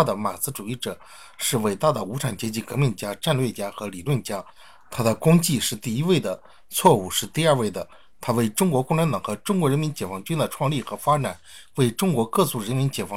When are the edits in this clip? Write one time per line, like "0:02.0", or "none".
none